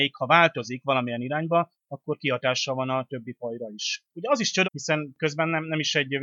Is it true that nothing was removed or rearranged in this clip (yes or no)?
no